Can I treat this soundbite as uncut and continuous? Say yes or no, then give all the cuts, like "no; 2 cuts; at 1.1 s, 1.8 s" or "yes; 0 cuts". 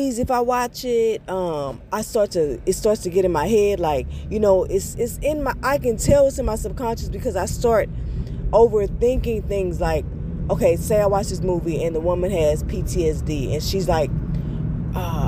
yes; 0 cuts